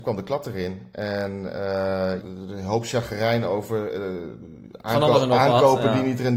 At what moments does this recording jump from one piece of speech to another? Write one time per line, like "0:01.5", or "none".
0:02.2